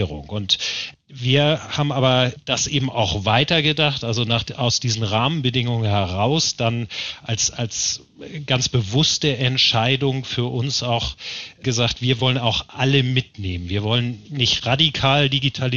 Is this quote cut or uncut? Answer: uncut